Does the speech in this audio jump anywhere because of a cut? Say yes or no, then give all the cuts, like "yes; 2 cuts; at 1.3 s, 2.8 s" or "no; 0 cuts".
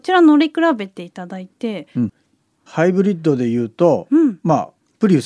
yes; 1 cut; at 2.1 s